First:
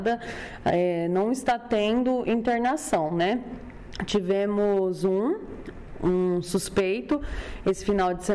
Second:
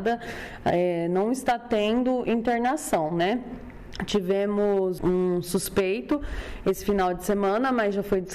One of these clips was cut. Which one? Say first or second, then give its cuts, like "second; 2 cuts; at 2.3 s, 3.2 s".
second; 1 cut; at 5.0 s